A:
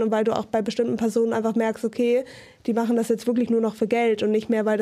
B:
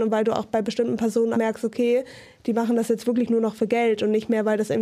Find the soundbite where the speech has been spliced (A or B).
B